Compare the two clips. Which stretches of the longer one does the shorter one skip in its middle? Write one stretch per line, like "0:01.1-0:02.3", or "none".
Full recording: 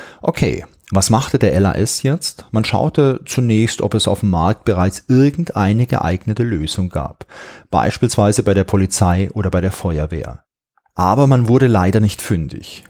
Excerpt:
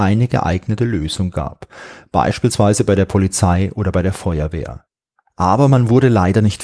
none